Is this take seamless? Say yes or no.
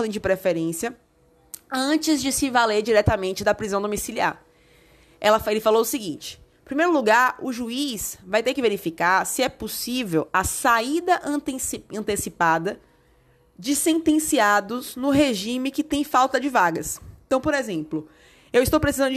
yes